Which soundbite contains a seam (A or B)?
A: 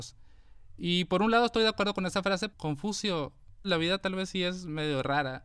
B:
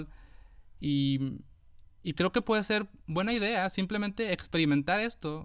A